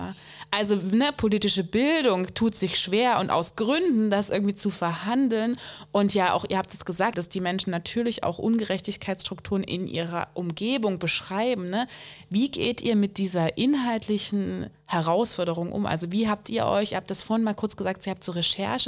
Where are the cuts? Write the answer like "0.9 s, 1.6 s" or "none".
7.1 s